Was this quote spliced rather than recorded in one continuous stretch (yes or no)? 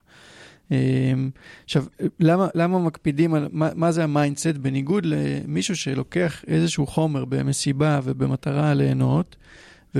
no